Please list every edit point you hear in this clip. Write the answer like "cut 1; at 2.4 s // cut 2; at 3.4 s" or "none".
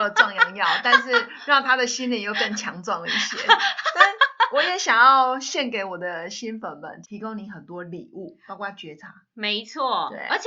cut 1; at 7.0 s